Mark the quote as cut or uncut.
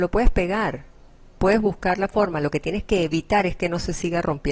uncut